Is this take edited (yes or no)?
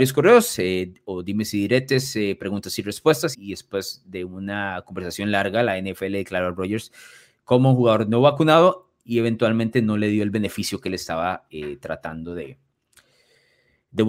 yes